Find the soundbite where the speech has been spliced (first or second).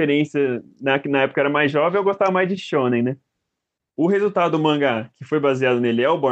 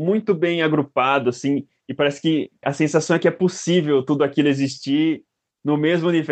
first